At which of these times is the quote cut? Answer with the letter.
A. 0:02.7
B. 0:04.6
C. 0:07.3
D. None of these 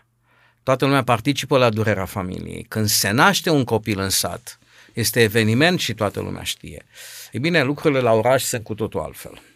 D